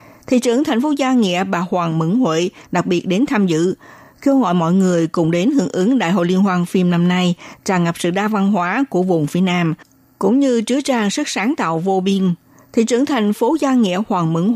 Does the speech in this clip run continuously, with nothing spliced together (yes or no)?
yes